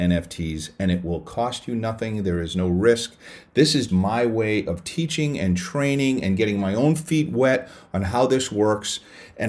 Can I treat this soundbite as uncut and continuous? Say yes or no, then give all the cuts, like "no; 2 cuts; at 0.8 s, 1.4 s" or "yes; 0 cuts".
no; 1 cut; at 3.9 s